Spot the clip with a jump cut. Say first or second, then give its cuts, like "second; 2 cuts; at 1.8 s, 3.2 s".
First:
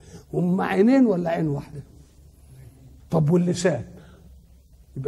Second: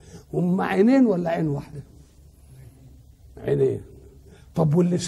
first; 1 cut; at 3.0 s